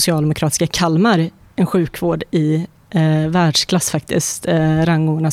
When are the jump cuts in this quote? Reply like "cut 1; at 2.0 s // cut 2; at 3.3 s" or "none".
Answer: none